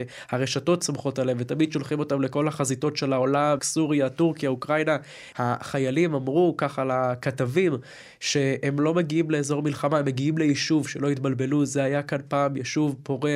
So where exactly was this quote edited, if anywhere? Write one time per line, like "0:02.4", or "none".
0:03.6
0:05.3